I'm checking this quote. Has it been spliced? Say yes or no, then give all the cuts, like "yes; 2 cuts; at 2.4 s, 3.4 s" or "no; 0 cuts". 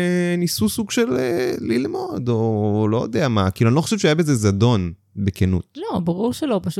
no; 0 cuts